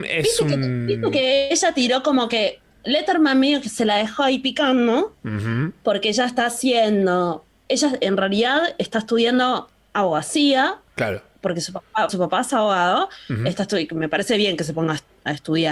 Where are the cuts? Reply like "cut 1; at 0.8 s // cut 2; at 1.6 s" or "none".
cut 1; at 12.1 s